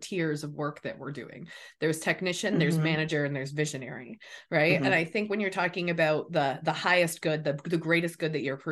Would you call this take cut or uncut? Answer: uncut